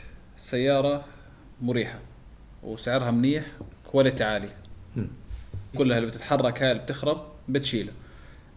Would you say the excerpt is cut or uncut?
cut